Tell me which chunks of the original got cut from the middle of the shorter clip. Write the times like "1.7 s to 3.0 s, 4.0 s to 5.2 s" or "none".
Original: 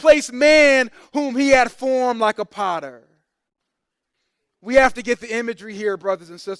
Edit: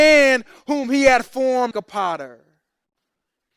2.2 s to 2.3 s